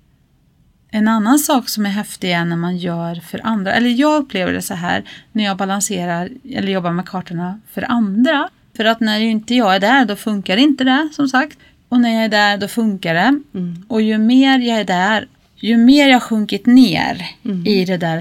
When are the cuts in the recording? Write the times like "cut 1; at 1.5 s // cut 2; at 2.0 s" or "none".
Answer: cut 1; at 8.8 s // cut 2; at 15.4 s